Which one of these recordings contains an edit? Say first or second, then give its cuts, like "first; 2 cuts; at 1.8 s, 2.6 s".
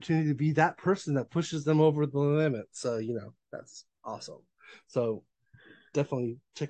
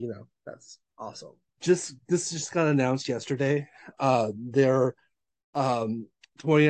second; 1 cut; at 1.5 s